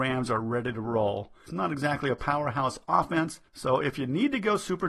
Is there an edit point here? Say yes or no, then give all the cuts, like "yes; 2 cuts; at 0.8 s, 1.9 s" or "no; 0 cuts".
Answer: yes; 2 cuts; at 1.5 s, 3.5 s